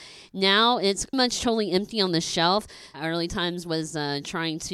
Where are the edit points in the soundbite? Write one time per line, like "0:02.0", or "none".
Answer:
0:01.1
0:02.9